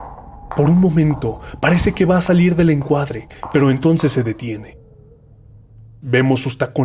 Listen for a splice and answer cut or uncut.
uncut